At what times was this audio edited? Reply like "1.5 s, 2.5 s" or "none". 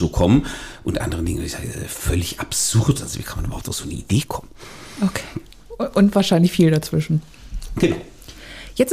none